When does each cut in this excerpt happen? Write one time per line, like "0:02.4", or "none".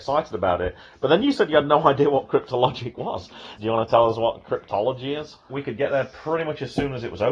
0:03.6
0:05.5